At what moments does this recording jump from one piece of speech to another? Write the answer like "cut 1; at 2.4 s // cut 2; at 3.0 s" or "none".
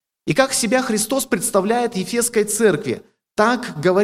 none